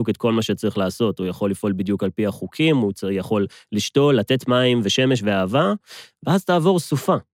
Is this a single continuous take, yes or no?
yes